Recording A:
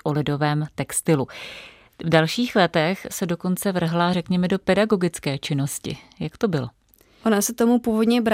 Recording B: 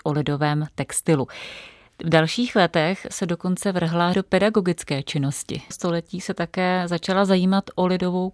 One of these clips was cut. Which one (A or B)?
B